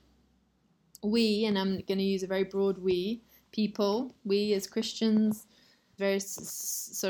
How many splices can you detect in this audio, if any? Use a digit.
1